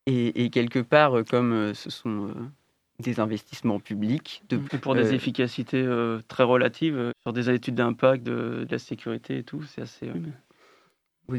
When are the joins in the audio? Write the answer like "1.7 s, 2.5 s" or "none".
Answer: 4.7 s, 7.1 s, 10.1 s